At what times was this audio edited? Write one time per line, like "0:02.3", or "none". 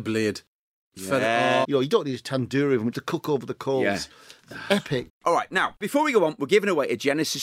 0:01.6
0:02.9
0:05.1